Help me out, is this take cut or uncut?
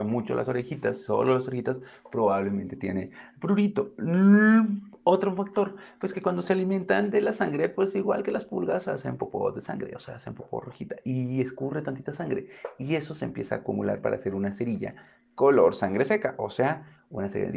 uncut